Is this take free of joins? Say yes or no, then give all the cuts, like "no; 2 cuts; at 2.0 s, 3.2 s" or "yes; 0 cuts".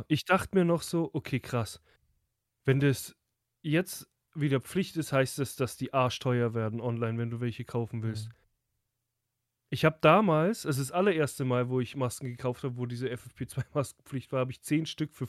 yes; 0 cuts